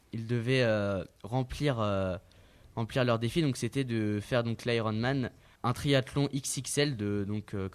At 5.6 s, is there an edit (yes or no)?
yes